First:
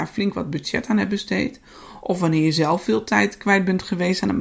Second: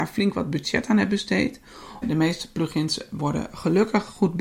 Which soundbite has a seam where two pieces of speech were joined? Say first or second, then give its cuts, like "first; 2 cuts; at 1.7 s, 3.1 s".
second; 1 cut; at 2.0 s